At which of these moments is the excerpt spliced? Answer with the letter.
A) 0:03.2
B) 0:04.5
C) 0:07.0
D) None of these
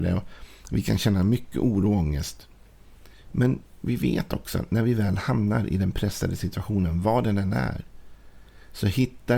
D